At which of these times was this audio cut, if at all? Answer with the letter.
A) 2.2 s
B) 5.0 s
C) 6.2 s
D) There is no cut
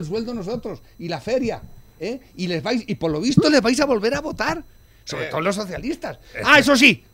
D